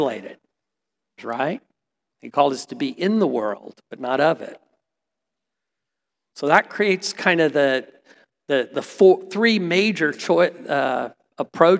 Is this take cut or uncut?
cut